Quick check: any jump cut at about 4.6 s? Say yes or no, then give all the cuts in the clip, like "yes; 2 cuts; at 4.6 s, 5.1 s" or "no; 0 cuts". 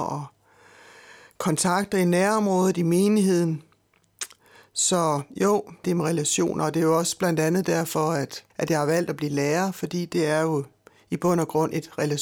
no; 2 cuts; at 5.8 s, 8.5 s